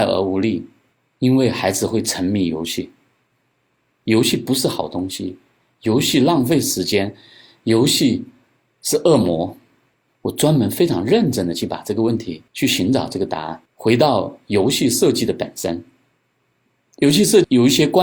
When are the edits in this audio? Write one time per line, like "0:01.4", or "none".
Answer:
0:10.1
0:13.6

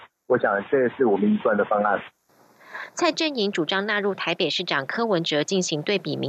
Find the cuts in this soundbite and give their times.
none

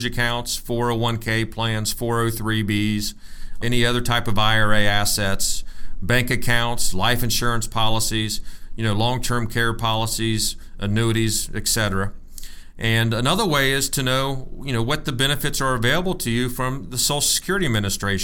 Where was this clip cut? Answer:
0:03.6

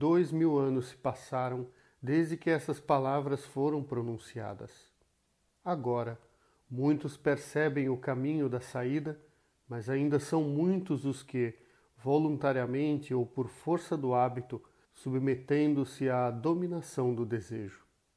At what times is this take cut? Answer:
0:05.6
0:14.8

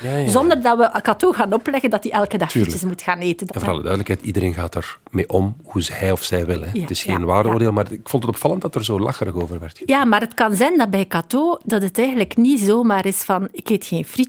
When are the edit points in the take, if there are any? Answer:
0:03.5

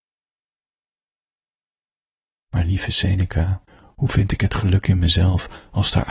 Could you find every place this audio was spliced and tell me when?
0:03.7

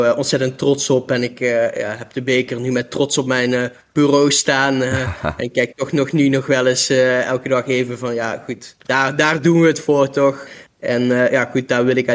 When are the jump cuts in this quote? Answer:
none

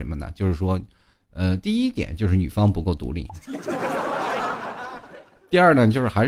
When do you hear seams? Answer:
none

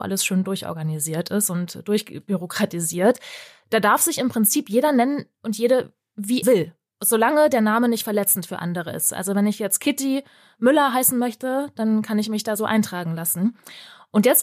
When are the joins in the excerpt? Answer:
0:06.4

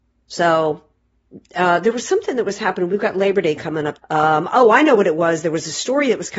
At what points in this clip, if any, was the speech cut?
0:04.0

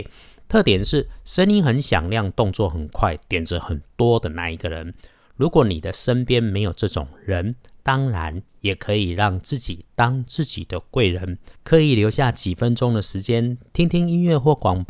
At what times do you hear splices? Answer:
0:11.6

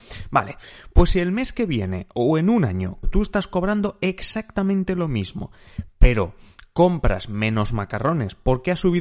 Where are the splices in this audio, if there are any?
0:03.0

